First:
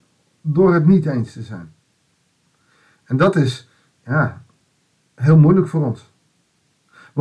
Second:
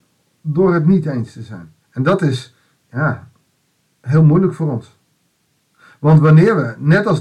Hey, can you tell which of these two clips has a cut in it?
second; 1 cut; at 1.8 s

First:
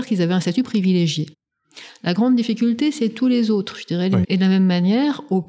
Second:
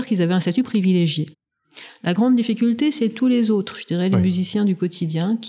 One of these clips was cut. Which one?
first; 1 cut; at 4.2 s

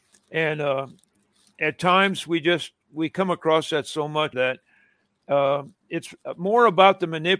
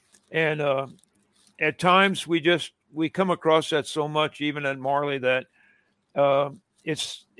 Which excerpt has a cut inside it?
first; 2 cuts; at 4.3 s, 5.8 s

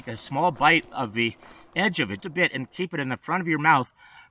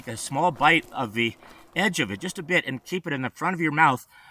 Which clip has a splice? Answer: first; 1 cut; at 2.2 s

